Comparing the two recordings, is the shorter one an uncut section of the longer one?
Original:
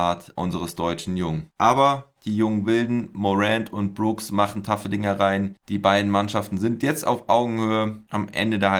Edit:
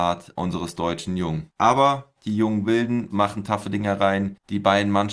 no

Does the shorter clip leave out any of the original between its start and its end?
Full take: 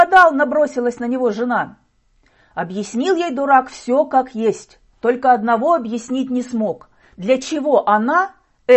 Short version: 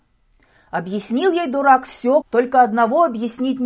yes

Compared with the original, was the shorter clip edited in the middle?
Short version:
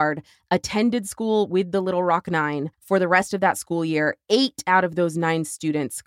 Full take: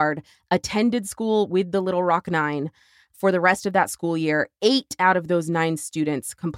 yes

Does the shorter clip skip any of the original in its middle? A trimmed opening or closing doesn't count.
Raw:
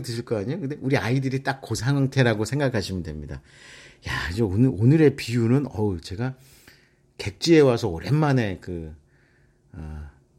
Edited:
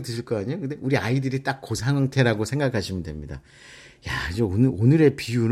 no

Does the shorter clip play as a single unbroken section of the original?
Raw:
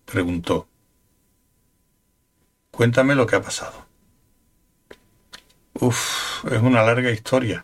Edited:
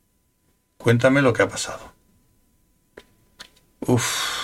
yes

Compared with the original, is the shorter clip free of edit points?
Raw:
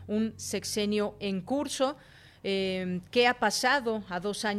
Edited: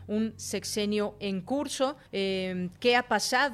no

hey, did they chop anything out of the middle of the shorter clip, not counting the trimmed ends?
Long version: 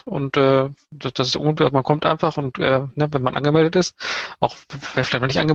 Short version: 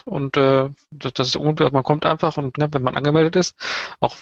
yes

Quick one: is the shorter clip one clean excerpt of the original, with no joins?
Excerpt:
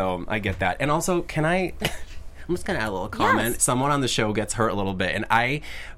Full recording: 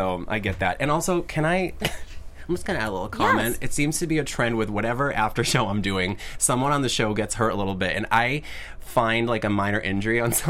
no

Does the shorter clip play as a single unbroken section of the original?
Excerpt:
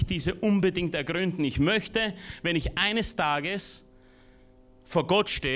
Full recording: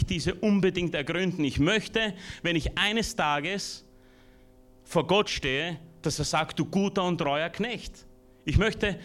yes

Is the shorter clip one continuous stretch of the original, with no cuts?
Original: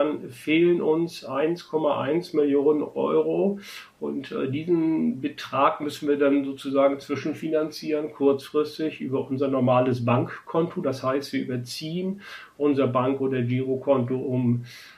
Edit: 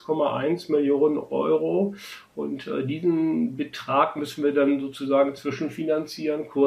yes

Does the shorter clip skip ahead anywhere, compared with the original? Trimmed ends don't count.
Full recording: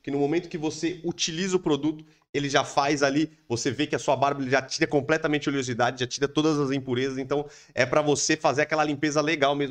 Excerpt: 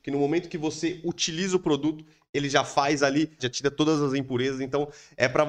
yes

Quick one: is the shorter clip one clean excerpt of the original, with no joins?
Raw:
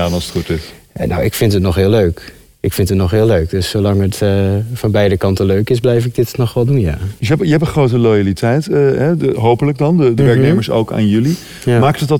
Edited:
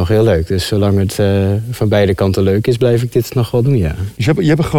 yes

